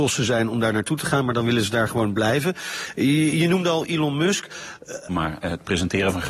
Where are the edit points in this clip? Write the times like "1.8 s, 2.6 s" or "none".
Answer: 5.1 s